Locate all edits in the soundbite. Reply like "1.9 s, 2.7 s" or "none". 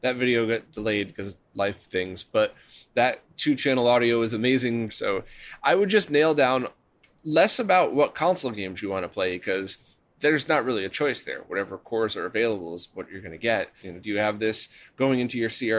4.9 s, 13.8 s